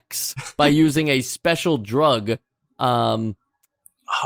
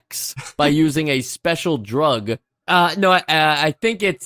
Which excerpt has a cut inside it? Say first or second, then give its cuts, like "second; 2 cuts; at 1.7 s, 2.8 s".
second; 1 cut; at 2.6 s